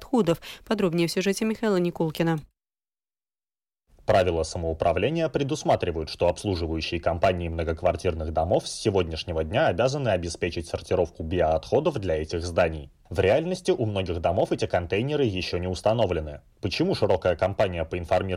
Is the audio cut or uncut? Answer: uncut